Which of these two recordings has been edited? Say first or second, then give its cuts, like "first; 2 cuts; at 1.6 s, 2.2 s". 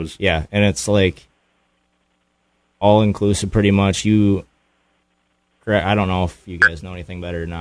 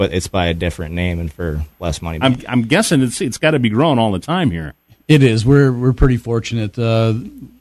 second; 1 cut; at 2.2 s